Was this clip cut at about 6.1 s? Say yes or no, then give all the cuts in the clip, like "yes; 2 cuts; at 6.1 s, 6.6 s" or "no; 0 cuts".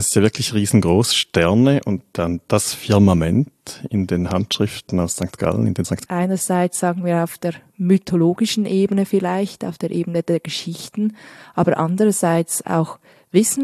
yes; 1 cut; at 6.1 s